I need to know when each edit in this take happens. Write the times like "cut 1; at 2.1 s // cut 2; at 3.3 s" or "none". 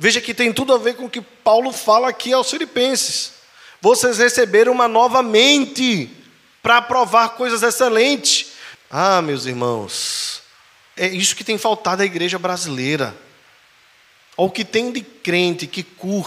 cut 1; at 8.7 s // cut 2; at 11.0 s